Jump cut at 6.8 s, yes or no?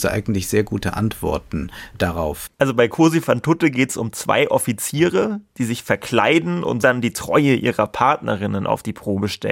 yes